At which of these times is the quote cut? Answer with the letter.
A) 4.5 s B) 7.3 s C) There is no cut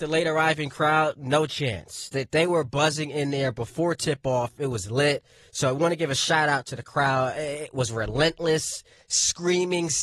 C